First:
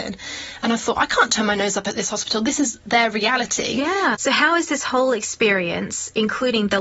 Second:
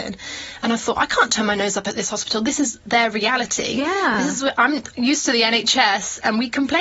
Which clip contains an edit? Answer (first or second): first